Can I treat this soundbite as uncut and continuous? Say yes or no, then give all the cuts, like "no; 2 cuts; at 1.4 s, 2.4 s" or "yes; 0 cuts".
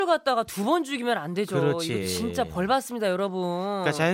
yes; 0 cuts